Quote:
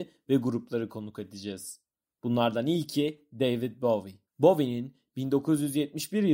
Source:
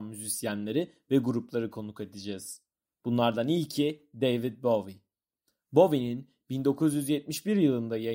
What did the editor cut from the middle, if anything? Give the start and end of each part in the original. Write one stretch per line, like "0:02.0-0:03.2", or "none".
0:05.1-0:05.6